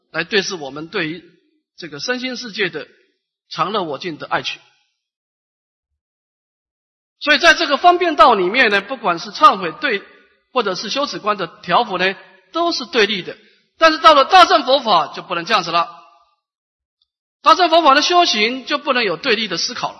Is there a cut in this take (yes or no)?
no